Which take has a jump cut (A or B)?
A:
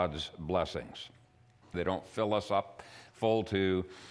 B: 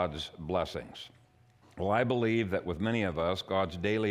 A